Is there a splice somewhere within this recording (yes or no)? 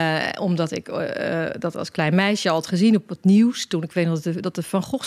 no